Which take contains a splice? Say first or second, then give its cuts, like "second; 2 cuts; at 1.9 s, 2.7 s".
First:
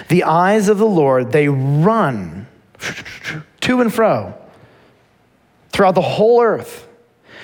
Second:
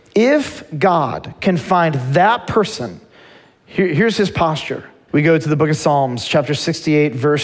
second; 1 cut; at 5.1 s